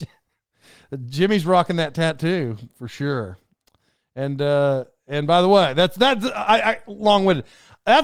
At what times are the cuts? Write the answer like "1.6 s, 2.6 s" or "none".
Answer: none